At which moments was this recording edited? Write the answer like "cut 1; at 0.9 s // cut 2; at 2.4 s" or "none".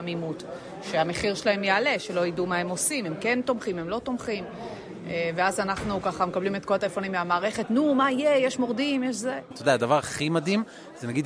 cut 1; at 9.5 s